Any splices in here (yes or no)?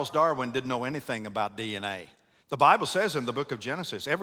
yes